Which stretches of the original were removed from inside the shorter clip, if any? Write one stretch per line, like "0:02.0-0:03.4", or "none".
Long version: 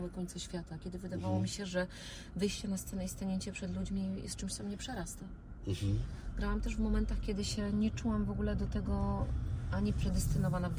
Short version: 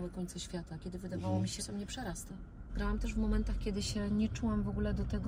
0:01.6-0:04.5
0:05.6-0:06.3